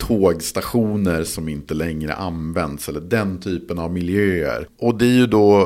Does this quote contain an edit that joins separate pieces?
yes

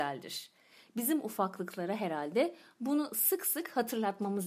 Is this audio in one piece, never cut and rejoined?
yes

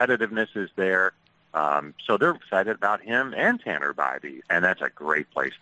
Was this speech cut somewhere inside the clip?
yes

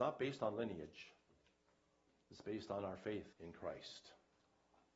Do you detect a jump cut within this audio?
yes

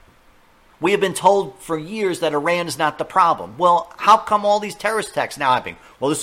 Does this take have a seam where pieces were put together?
no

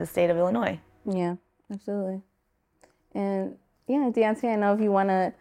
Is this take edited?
no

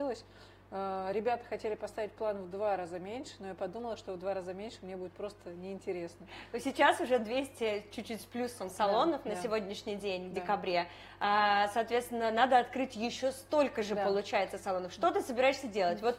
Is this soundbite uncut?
yes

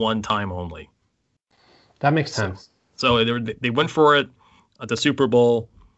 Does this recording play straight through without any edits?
yes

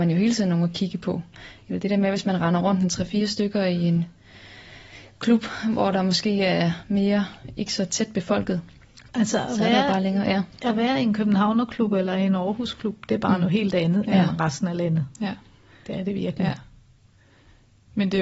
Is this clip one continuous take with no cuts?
yes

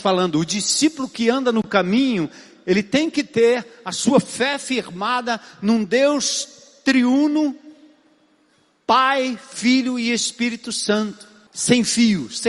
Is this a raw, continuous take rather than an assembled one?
no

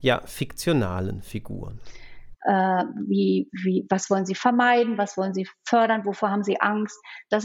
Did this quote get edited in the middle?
yes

